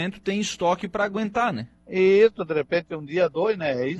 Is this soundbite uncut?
no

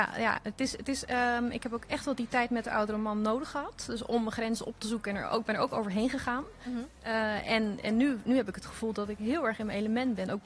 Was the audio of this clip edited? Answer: no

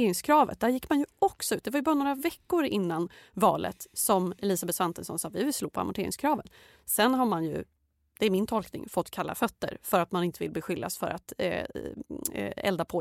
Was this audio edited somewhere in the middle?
no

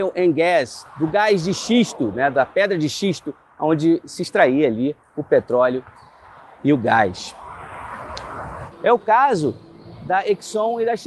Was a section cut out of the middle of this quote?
yes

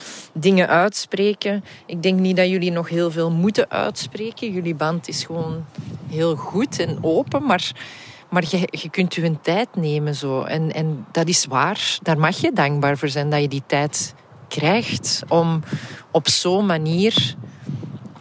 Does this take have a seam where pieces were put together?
no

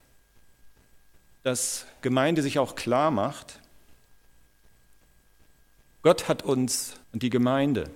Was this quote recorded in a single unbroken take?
no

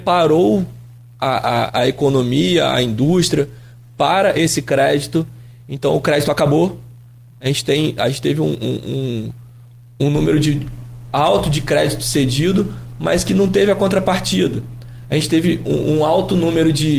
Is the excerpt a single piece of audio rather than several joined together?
yes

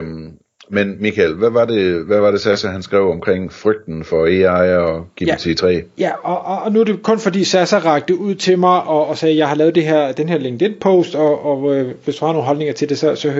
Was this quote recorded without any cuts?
yes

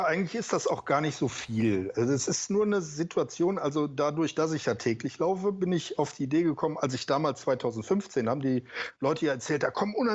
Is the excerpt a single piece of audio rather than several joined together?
yes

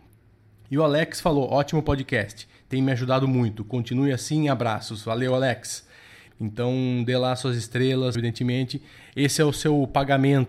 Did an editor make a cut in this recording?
yes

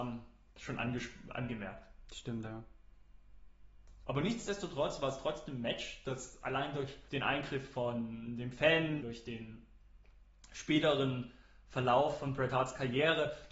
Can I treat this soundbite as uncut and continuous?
no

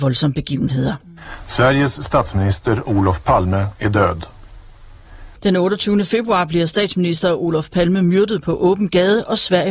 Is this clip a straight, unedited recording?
no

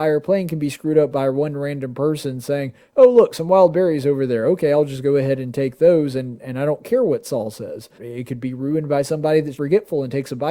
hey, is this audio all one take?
no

